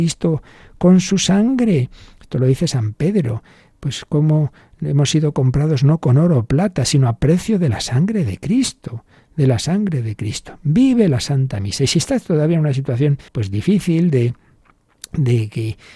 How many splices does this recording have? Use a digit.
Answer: 1